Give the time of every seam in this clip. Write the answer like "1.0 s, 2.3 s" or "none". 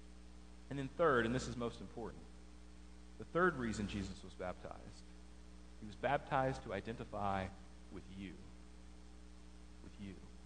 5.8 s